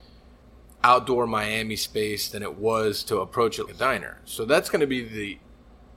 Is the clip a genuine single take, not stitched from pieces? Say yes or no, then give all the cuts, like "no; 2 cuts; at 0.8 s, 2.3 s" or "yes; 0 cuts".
no; 1 cut; at 3.7 s